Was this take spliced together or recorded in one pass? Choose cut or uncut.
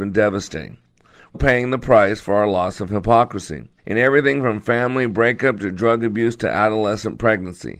cut